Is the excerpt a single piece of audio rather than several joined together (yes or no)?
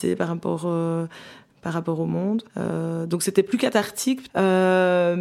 no